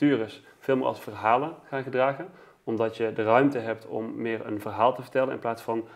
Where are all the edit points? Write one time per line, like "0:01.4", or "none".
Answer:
none